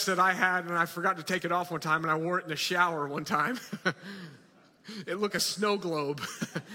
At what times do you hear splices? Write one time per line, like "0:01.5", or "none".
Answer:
0:05.3